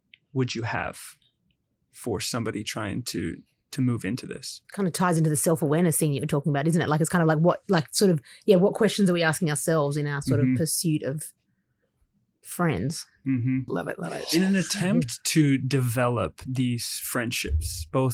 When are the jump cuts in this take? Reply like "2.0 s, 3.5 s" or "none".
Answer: 4.6 s, 13.7 s